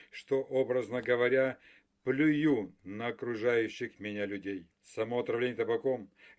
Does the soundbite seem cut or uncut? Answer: cut